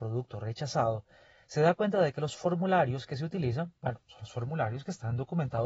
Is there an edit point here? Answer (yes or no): no